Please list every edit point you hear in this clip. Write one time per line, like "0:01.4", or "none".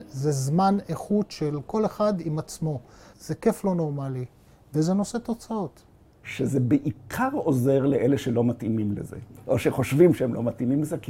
0:03.1
0:06.2